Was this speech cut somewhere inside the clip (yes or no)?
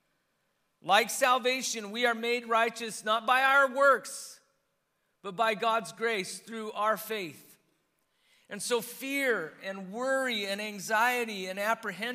no